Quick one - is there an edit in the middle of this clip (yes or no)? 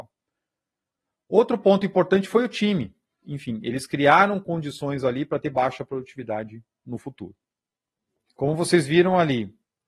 yes